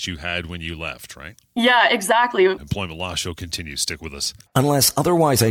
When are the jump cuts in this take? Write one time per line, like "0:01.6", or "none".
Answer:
0:01.5
0:02.6
0:04.5